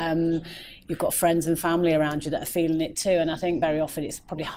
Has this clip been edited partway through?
no; 0 cuts

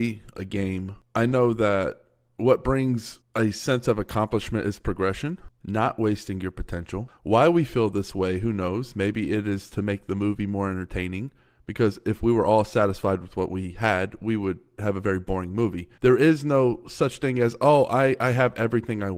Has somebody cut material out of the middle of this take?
yes; 1 cut; at 16.0 s

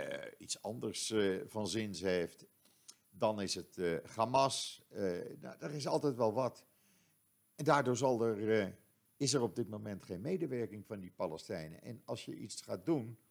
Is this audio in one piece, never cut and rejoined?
yes; 0 cuts

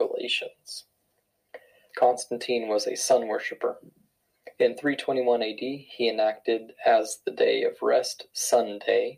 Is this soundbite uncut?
no; 1 cut; at 1.9 s

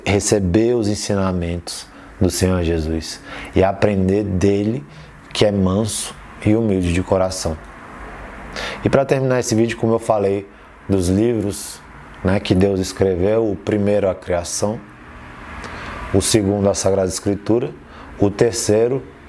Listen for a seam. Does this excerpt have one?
no; 0 cuts

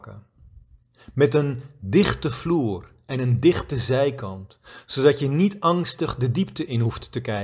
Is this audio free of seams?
yes; 0 cuts

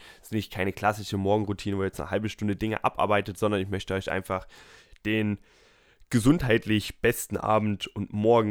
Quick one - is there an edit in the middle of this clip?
no; 0 cuts

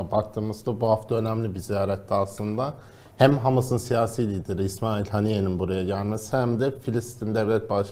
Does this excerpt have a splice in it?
no; 0 cuts

